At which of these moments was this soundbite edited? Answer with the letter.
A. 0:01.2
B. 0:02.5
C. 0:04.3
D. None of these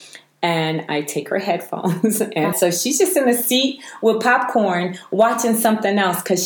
B